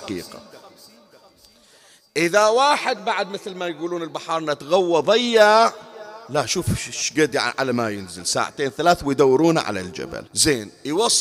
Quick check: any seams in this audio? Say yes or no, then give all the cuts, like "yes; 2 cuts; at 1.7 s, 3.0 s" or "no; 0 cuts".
yes; 1 cut; at 10.3 s